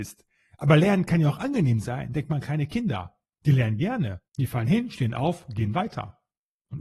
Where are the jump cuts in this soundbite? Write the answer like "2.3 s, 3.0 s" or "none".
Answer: 4.3 s